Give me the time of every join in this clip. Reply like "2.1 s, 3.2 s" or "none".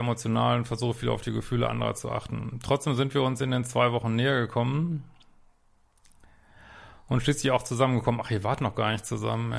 none